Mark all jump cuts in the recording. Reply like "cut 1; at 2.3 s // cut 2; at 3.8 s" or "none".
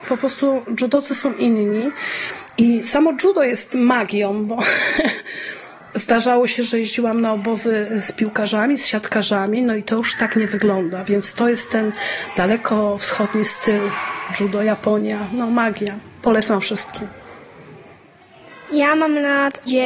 none